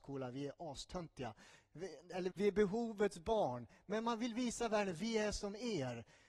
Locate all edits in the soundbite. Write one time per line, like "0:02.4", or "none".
0:02.3